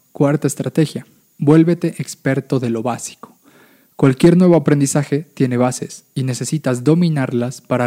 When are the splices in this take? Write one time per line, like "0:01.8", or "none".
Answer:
none